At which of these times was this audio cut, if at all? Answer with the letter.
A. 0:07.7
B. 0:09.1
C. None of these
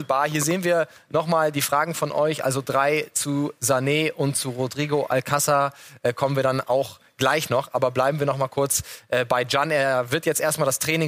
C